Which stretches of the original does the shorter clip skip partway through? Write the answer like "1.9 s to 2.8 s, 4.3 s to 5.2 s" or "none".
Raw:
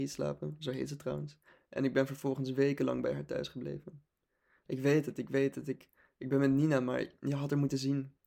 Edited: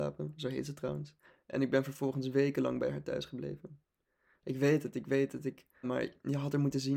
6.1 s to 6.8 s